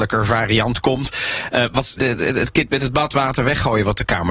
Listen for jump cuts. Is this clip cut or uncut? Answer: cut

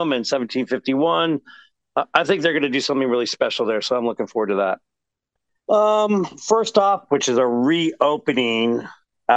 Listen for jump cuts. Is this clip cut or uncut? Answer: cut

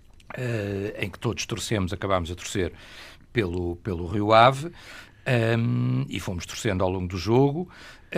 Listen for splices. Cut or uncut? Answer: uncut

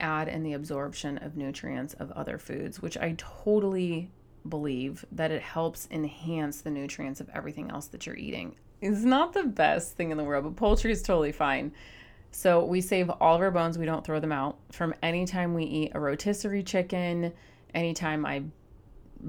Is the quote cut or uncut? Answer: cut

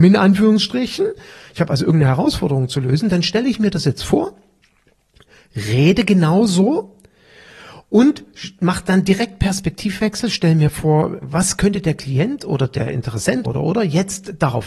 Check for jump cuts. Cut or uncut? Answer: cut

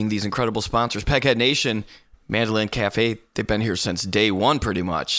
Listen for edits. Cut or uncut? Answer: uncut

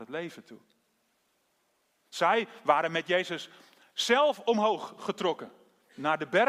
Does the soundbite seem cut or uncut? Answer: uncut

